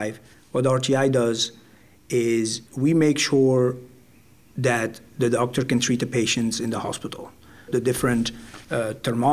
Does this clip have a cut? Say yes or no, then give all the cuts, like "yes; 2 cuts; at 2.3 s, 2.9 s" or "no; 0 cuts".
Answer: yes; 2 cuts; at 2.7 s, 7.7 s